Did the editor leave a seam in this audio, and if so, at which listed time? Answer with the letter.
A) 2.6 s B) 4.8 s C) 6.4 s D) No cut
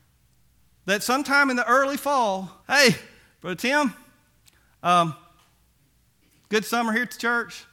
A